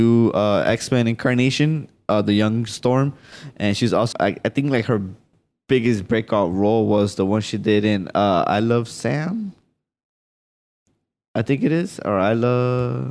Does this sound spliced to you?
yes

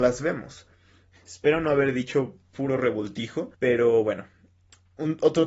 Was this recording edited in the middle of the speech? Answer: yes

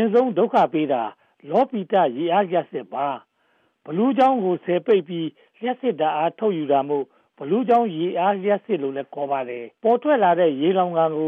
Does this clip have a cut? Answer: yes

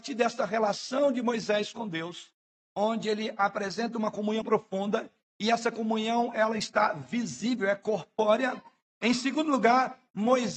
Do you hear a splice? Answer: yes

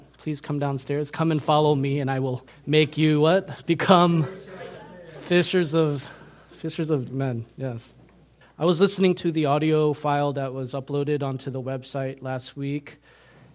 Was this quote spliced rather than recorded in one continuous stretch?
yes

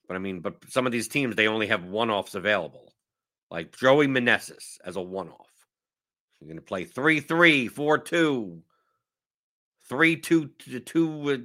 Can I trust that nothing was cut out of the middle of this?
no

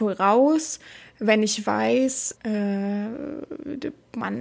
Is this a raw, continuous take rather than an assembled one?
no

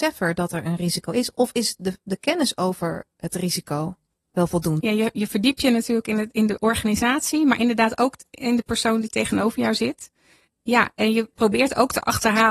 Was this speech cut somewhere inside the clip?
yes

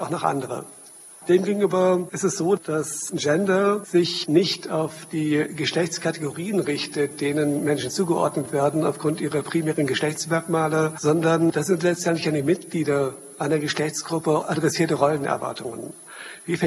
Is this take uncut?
yes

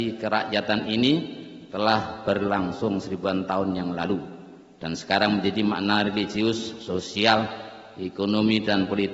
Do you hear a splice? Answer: no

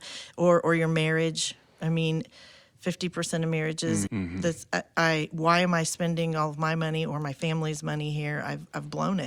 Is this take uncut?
no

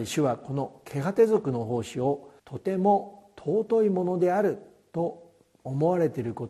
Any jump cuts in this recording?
yes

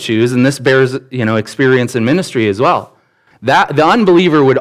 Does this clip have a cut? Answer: yes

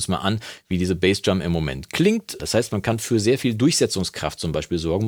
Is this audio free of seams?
no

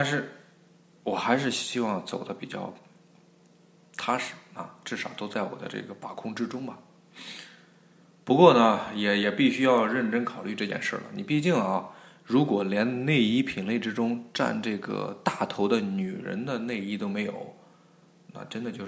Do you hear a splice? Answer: no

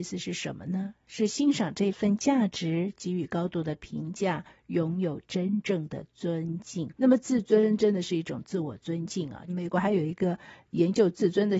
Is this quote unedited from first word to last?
no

